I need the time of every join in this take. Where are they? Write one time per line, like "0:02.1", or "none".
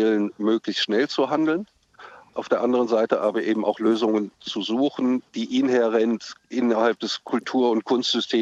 0:05.3